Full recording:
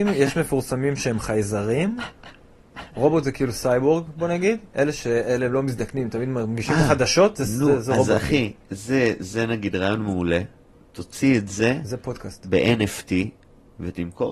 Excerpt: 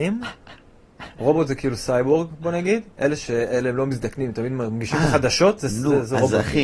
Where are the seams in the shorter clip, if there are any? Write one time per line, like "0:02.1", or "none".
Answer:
none